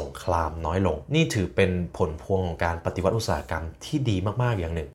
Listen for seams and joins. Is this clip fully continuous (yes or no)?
no